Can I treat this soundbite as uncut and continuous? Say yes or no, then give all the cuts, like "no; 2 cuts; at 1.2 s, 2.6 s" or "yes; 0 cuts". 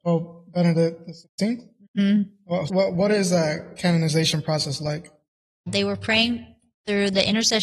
no; 2 cuts; at 2.7 s, 5.7 s